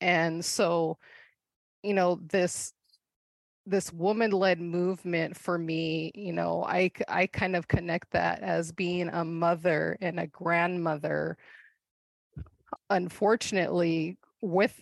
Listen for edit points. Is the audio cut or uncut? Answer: cut